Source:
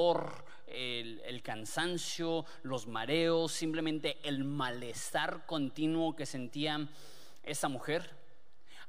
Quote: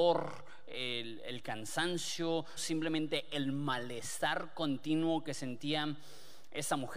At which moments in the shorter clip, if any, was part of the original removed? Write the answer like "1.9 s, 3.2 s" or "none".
2.6 s